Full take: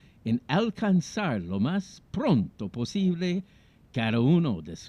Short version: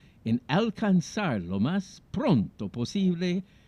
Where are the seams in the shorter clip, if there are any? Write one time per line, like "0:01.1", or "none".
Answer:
none